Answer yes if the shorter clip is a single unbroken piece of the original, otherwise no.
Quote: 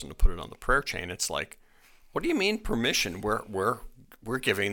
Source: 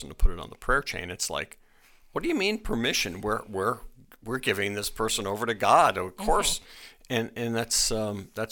yes